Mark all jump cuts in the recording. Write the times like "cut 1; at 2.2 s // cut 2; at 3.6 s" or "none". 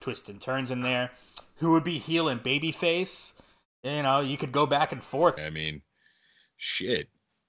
cut 1; at 5.4 s